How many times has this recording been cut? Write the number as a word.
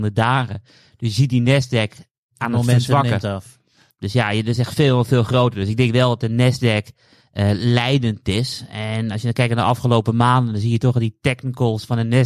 one